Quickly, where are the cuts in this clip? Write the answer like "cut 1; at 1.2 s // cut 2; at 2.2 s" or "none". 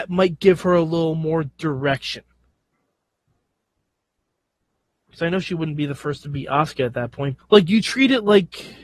cut 1; at 4.9 s // cut 2; at 7.4 s